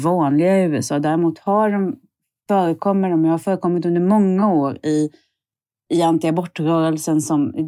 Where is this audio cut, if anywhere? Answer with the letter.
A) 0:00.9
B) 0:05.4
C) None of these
C